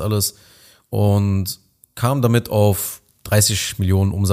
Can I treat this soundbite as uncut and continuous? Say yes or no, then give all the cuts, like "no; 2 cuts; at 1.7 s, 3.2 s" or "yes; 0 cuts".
yes; 0 cuts